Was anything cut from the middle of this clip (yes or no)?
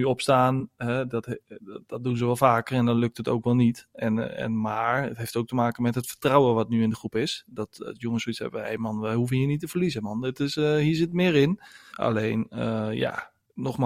yes